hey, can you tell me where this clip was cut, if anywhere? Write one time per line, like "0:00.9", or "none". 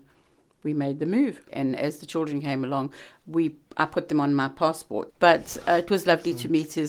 0:01.5
0:05.1

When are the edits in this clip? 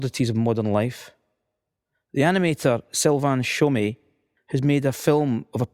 0:04.4

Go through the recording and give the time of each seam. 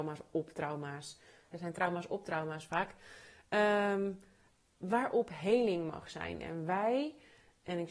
0:01.5

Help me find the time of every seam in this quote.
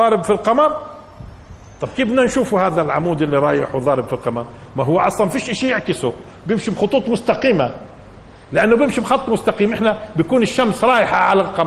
none

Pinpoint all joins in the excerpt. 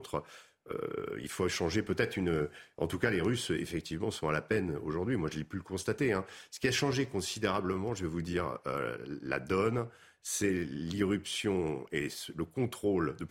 none

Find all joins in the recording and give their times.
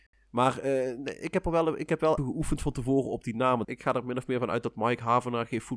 0:02.2
0:03.6

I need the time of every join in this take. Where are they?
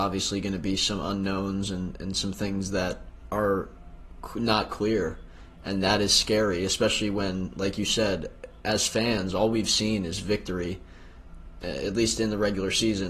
none

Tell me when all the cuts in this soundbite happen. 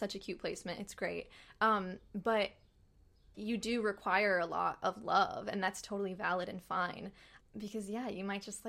0:03.3
0:07.4

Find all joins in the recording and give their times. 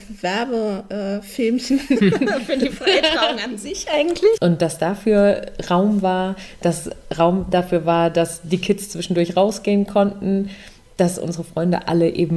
0:04.4

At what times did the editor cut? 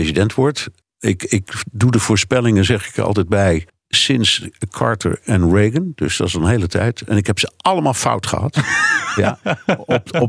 none

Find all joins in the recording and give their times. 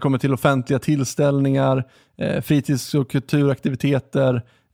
none

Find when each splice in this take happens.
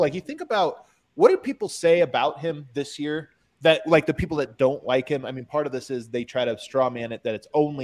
none

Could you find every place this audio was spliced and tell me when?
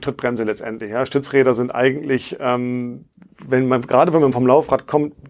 none

